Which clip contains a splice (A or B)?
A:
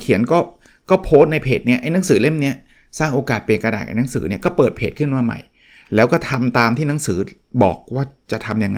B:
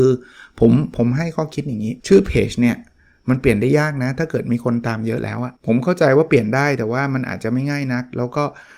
B